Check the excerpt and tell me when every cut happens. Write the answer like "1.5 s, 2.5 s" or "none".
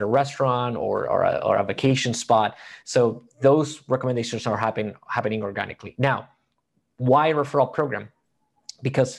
none

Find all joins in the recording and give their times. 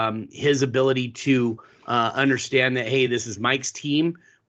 none

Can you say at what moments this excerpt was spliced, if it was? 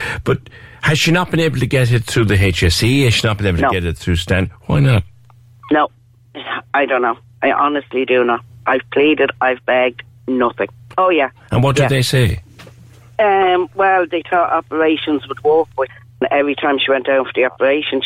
10.9 s

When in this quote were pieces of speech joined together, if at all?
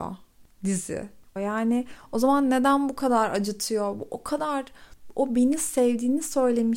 1.4 s

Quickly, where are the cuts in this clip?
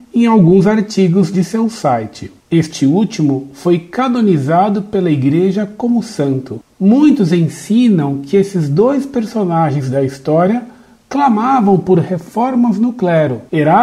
2.4 s, 6.7 s

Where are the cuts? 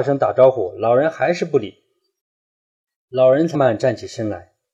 2.2 s, 3.5 s

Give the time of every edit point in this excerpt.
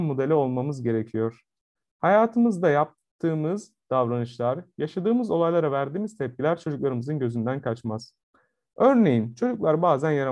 none

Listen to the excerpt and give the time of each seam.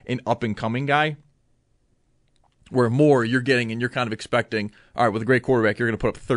none

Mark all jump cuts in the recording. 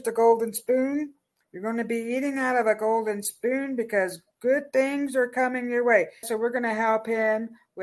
6.2 s

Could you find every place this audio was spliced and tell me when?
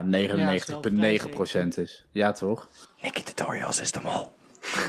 none

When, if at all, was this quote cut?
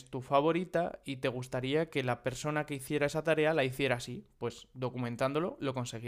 none

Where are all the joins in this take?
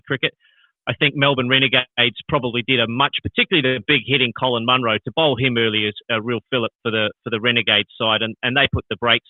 3.2 s

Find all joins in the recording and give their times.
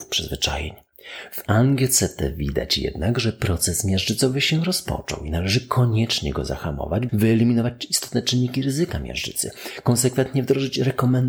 7.1 s

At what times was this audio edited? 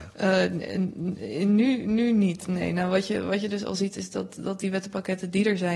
none

